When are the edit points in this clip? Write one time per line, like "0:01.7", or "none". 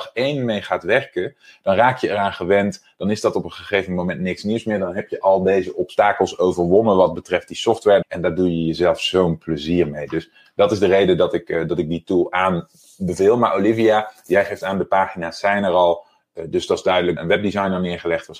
0:08.0
0:17.2